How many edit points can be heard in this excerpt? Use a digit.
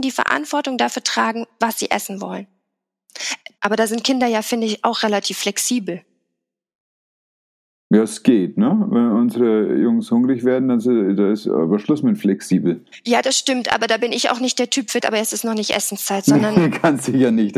2